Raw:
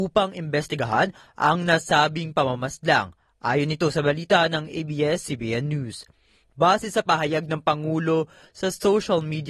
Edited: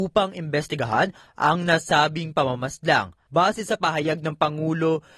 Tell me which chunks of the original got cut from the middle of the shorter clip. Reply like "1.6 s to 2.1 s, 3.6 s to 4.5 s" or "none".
3.3 s to 6.5 s